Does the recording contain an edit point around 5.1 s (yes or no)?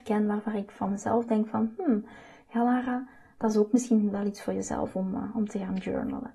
no